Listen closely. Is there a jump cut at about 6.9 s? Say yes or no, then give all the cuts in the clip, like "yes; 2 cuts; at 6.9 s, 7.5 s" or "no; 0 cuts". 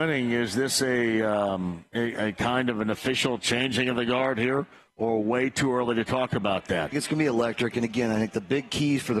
yes; 1 cut; at 6.9 s